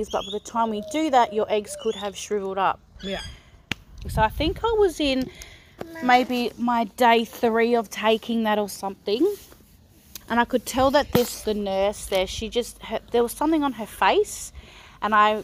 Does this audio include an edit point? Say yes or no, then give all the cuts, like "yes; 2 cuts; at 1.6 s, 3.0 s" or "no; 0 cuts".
yes; 3 cuts; at 4.0 s, 10.2 s, 11.4 s